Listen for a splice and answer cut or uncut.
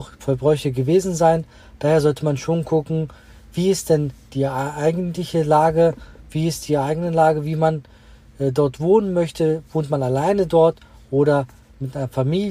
uncut